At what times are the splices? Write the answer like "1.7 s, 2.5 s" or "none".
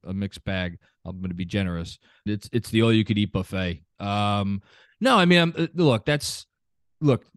2.3 s, 3.9 s

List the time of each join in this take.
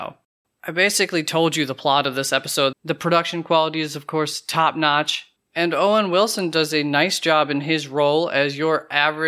2.7 s

